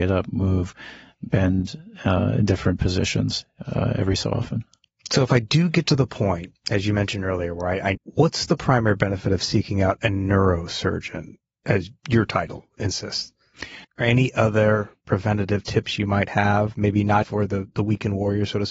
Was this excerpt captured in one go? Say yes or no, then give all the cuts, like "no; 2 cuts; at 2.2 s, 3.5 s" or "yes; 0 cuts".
no; 3 cuts; at 7.9 s, 13.8 s, 17.2 s